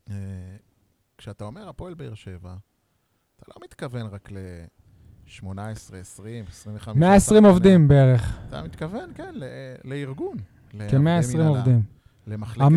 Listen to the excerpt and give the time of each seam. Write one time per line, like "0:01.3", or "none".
none